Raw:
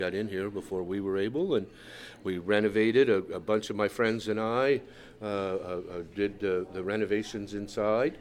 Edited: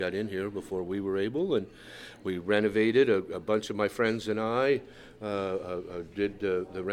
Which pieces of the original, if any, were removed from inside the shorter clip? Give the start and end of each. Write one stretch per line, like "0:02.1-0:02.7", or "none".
none